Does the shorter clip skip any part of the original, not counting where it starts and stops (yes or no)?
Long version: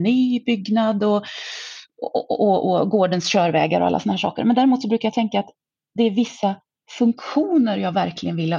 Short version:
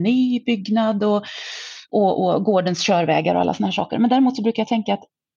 yes